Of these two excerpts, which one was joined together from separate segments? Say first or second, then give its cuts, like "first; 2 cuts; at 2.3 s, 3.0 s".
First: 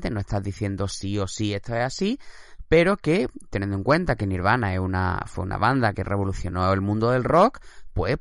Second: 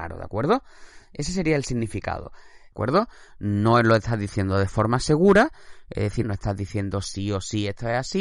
second; 2 cuts; at 2.7 s, 6.2 s